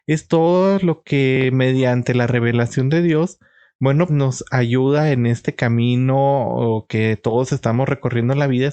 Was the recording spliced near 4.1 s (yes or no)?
yes